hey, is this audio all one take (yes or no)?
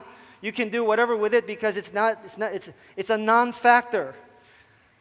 yes